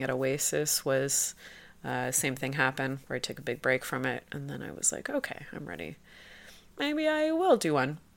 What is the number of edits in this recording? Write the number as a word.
one